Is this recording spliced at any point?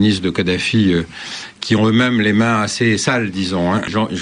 no; 0 cuts

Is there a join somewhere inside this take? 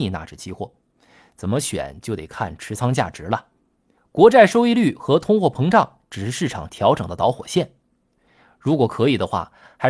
yes; 1 cut; at 4.0 s

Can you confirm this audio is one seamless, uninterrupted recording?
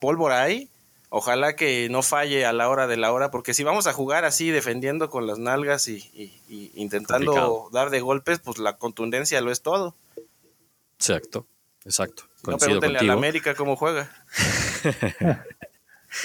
no; 1 cut; at 14.2 s

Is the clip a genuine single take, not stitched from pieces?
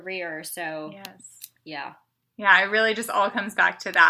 yes; 0 cuts

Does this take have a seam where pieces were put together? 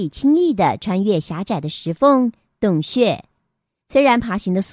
yes; 1 cut; at 3.8 s

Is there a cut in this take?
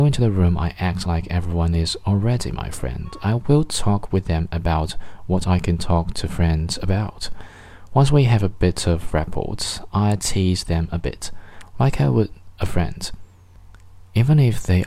no; 0 cuts

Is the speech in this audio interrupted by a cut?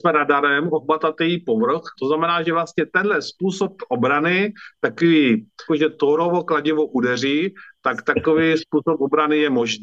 yes; 2 cuts; at 1.9 s, 5.7 s

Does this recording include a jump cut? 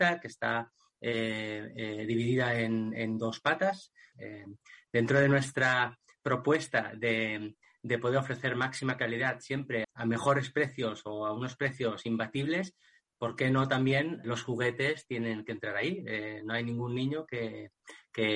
yes; 3 cuts; at 4.1 s, 9.8 s, 14.2 s

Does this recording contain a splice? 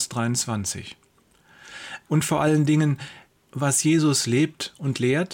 yes; 2 cuts; at 2.1 s, 3.5 s

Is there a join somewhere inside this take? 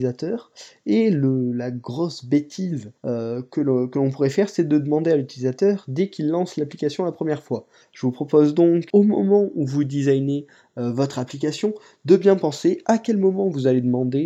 yes; 3 cuts; at 3.0 s, 7.8 s, 8.9 s

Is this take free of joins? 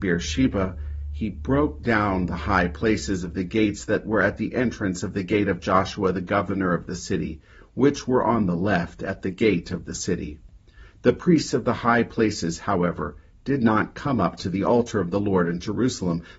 yes; 0 cuts

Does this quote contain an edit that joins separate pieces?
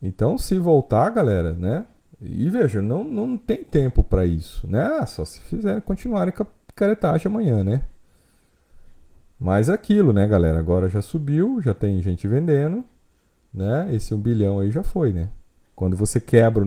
yes; 1 cut; at 15.6 s

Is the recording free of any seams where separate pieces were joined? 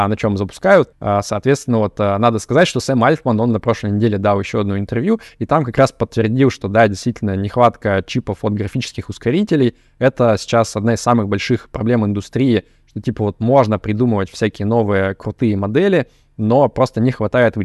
no; 1 cut; at 0.9 s

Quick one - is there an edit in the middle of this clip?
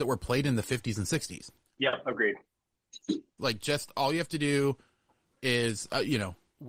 yes; 2 cuts; at 1.7 s, 3.4 s

